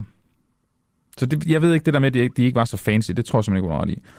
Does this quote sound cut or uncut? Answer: uncut